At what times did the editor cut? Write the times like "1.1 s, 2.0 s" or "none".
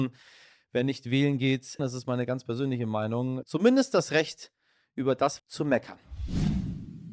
1.8 s, 3.4 s, 5.4 s